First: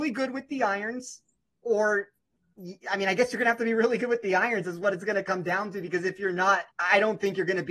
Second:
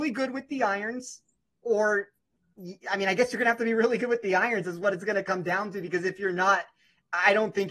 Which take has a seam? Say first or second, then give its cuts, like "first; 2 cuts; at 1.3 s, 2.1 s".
first; 1 cut; at 6.7 s